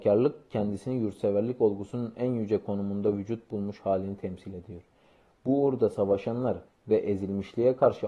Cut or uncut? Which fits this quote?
cut